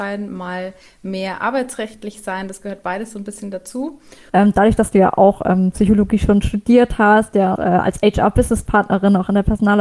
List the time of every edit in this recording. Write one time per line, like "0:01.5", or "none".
0:04.3
0:07.6